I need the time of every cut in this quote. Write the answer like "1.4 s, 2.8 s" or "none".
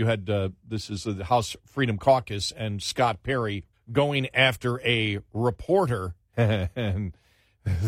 3.7 s, 6.3 s